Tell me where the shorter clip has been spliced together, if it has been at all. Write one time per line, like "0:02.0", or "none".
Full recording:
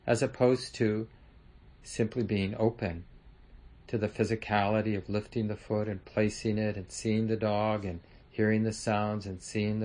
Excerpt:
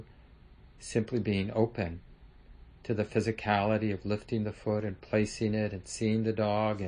none